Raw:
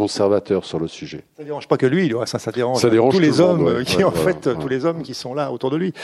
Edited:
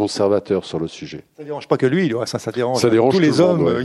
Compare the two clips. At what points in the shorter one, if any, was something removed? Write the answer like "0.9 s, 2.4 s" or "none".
none